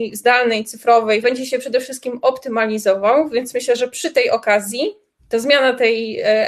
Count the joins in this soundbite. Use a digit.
1